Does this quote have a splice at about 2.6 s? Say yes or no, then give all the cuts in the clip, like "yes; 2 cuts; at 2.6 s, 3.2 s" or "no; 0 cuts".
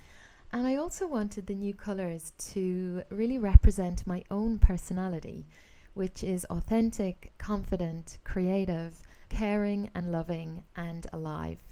no; 2 cuts; at 7.3 s, 9.3 s